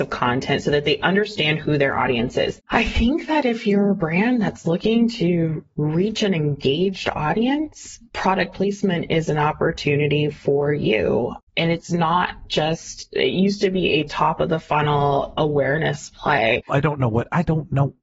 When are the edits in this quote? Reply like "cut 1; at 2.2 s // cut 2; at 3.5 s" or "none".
cut 1; at 2.6 s // cut 2; at 16.7 s